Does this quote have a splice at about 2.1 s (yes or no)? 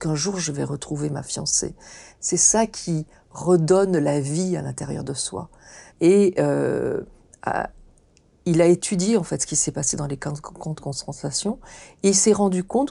yes